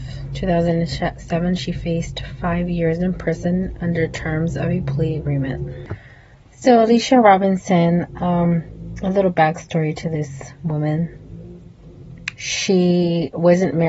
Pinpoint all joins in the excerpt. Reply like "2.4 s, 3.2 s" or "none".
none